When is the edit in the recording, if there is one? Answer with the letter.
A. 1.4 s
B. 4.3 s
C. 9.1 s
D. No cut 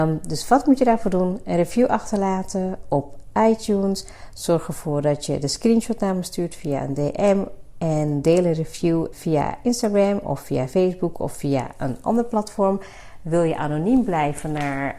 C